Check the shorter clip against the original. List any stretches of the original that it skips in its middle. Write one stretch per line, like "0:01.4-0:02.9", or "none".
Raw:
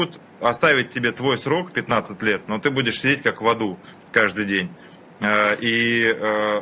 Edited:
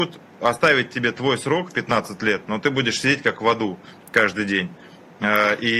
none